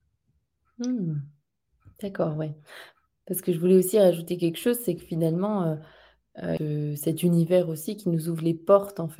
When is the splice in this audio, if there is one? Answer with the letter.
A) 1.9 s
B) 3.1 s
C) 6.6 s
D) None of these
C